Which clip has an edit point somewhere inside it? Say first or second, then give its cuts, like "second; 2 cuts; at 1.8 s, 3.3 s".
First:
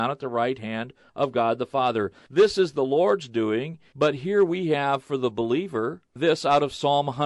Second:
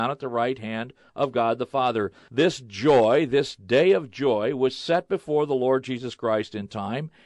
first; 2 cuts; at 2.2 s, 3.9 s